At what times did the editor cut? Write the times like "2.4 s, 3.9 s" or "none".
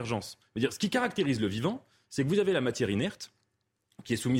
none